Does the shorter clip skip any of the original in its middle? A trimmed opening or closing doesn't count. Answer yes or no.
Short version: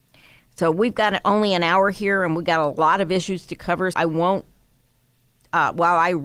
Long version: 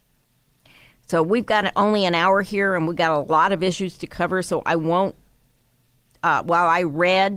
yes